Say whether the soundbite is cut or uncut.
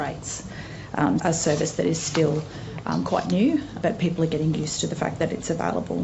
cut